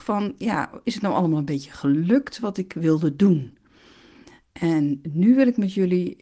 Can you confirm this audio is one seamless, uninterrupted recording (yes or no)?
yes